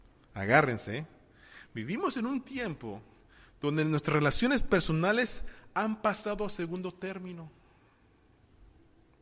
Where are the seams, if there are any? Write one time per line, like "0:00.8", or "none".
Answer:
none